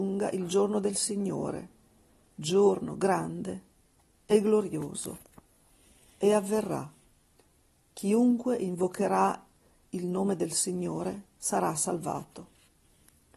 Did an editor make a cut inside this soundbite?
no; 0 cuts

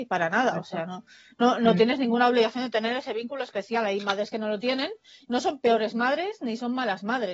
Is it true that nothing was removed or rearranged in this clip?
yes; 0 cuts

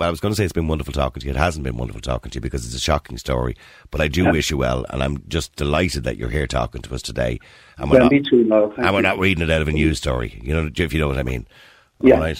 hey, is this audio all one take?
yes; 0 cuts

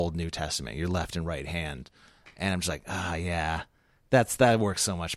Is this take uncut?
yes; 0 cuts

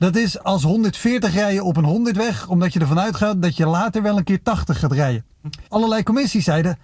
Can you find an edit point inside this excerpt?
yes; 1 cut; at 5.7 s

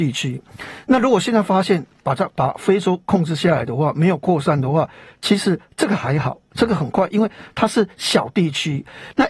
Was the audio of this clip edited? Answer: no; 0 cuts

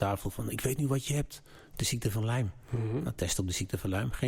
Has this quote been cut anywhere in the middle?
no; 0 cuts

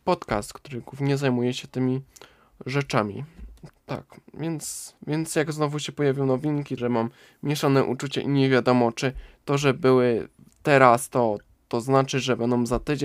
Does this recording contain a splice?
yes; 3 cuts; at 3.7 s, 5.0 s, 6.8 s

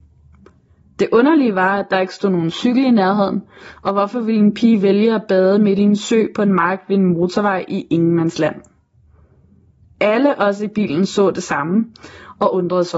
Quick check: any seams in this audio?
no; 0 cuts

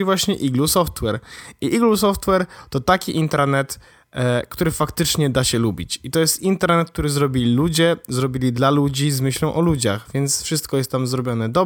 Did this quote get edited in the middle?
no; 0 cuts

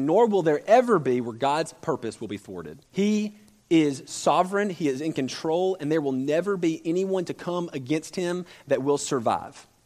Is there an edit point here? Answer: yes; 1 cut; at 2.9 s

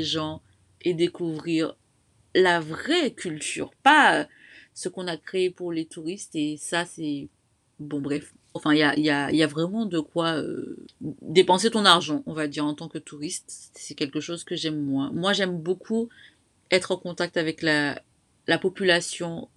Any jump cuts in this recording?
yes; 1 cut; at 8.6 s

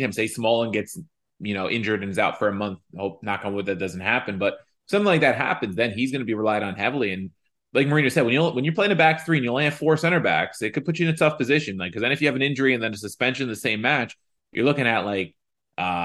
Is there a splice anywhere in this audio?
no; 0 cuts

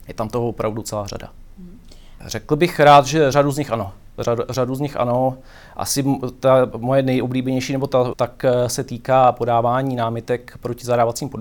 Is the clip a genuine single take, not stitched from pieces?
no; 2 cuts; at 2.2 s, 8.1 s

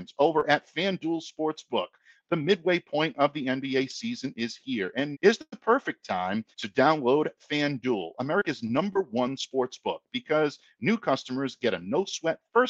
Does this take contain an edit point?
yes; 2 cuts; at 5.1 s, 6.5 s

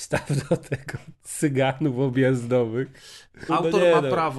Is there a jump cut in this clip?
yes; 1 cut; at 3.5 s

